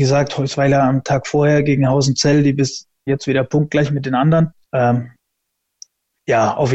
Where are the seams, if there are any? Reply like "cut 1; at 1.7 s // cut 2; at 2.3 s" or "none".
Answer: cut 1; at 3.1 s // cut 2; at 4.6 s